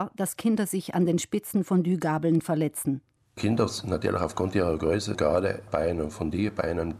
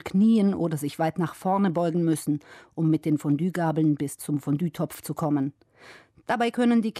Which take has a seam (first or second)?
first